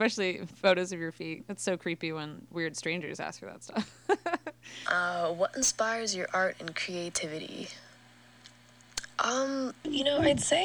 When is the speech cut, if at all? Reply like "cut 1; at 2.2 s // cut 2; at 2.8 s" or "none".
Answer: cut 1; at 4.8 s